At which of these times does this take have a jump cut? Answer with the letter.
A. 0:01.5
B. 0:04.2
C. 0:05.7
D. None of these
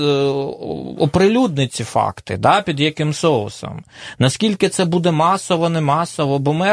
D